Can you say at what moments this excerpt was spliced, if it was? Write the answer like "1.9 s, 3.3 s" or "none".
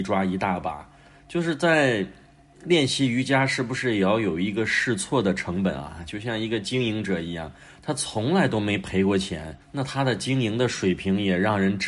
9.6 s

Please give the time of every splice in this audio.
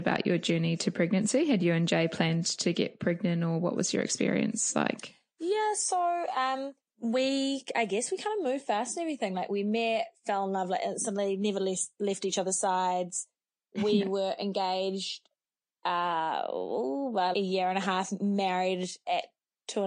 17.3 s

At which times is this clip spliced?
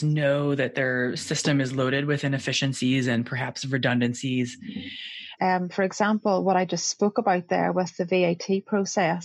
5.4 s

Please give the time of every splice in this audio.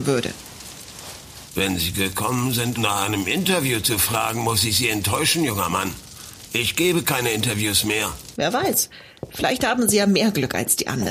2.8 s, 8.3 s

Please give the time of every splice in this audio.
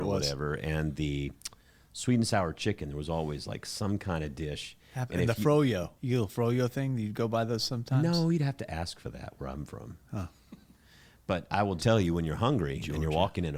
6.0 s, 11.8 s

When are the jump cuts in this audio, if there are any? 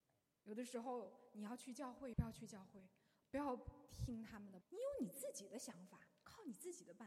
2.1 s, 4.6 s

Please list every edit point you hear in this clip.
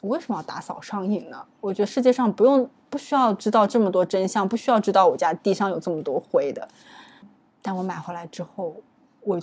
1.5 s

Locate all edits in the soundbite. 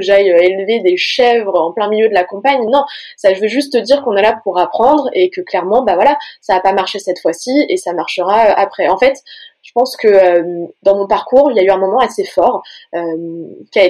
none

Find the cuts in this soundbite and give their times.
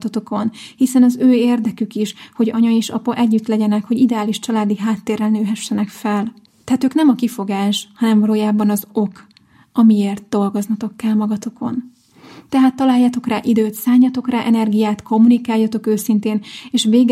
none

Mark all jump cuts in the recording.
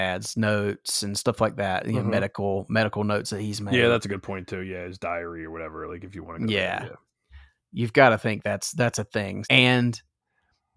9.4 s

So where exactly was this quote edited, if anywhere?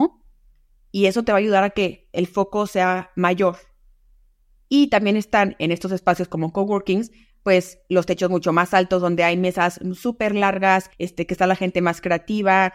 4.6 s, 10.9 s

